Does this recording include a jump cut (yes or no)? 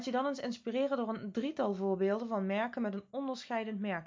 no